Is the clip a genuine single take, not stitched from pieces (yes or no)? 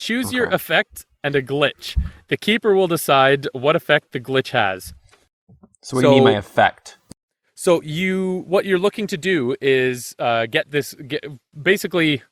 yes